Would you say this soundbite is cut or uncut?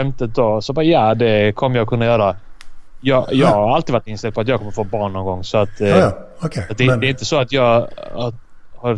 uncut